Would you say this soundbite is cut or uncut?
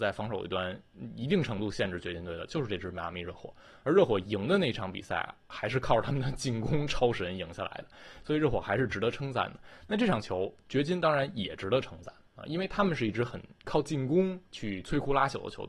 uncut